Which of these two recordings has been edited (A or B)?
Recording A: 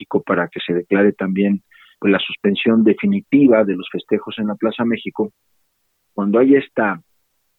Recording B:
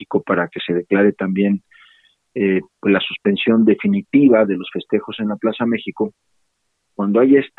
A